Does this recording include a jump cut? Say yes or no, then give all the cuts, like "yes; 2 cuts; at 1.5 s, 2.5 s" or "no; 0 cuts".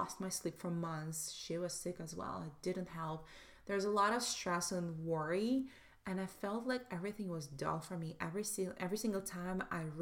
no; 0 cuts